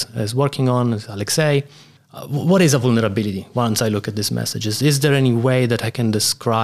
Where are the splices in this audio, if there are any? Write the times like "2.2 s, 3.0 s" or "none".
2.0 s